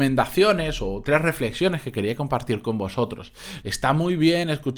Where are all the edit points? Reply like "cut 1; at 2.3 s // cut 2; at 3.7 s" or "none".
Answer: cut 1; at 3.6 s